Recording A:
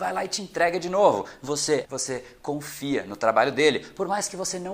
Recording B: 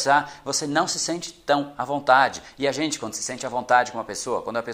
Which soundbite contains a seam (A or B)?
A